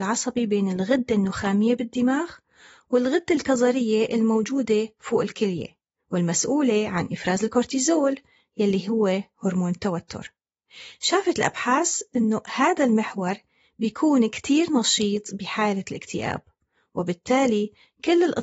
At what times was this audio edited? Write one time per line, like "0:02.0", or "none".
none